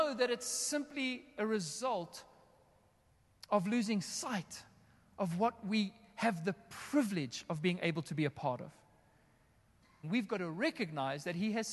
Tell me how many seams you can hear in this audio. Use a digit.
1